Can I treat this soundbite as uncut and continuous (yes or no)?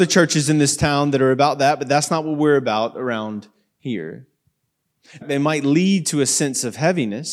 no